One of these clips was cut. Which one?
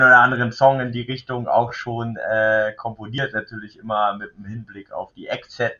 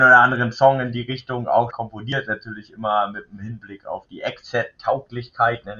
second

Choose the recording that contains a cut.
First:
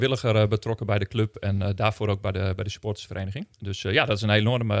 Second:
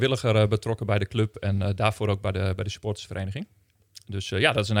first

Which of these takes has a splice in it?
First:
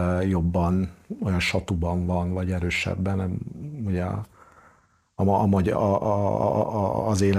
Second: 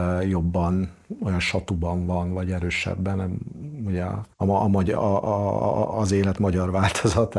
second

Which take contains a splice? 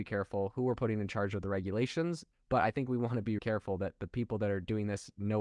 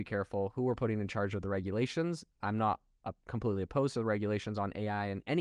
first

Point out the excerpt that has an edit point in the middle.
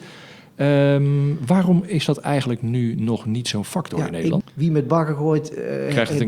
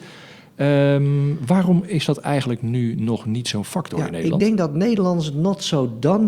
first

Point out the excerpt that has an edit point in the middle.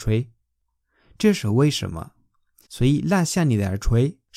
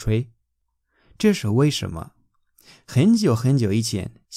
first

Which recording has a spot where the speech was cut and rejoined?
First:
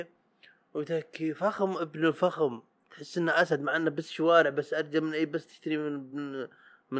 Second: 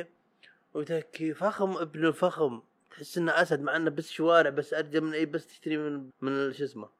second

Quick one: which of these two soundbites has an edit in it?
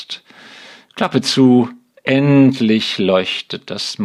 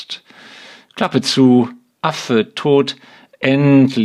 first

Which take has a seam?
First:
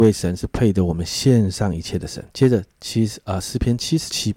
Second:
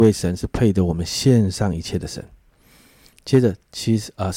first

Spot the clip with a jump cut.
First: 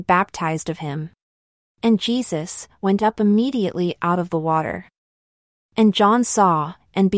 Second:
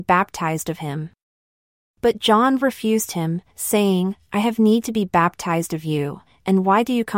first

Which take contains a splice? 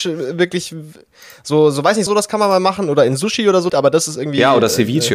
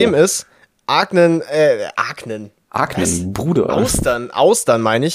first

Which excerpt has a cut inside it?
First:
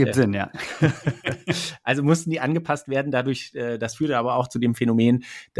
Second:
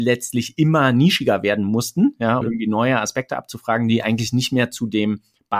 second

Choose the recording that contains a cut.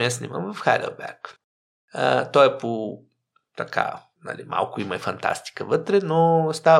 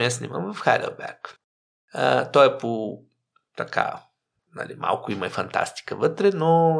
first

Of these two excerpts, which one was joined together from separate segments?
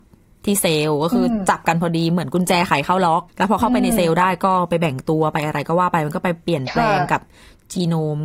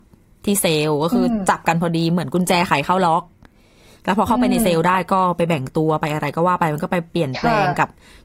first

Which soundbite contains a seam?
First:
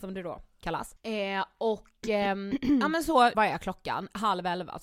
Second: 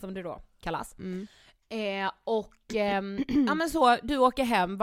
first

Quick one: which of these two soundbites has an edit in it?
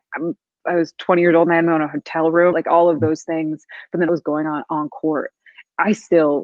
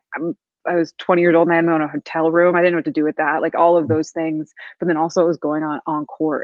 first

